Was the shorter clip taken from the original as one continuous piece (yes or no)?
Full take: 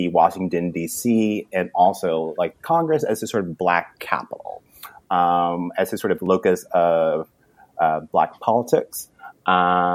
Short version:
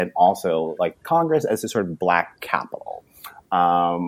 yes